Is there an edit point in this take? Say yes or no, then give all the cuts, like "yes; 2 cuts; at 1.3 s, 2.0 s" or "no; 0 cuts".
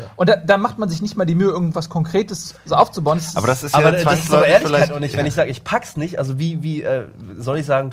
no; 0 cuts